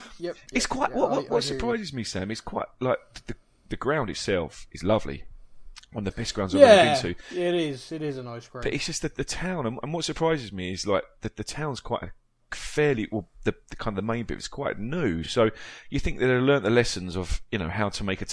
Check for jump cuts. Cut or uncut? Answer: uncut